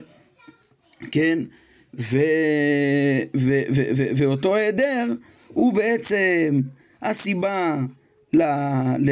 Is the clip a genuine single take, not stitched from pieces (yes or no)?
yes